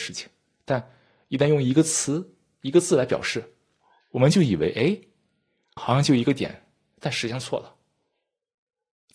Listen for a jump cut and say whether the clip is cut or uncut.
uncut